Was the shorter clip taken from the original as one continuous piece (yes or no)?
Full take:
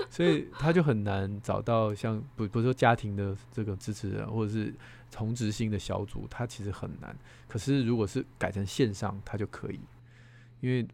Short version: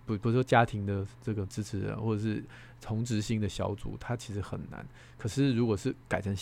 yes